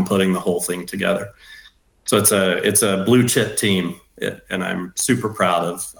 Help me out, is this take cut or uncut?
uncut